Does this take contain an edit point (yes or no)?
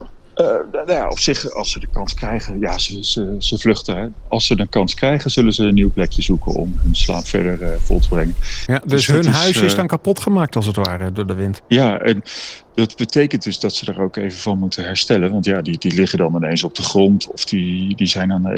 yes